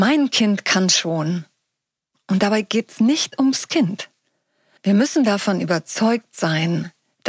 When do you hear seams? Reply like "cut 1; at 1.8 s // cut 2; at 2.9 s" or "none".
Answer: cut 1; at 2.1 s // cut 2; at 4.8 s